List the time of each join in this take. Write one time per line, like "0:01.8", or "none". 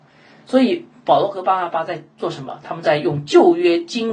none